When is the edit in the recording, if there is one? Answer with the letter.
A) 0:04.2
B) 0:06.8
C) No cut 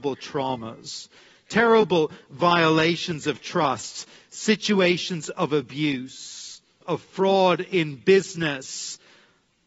B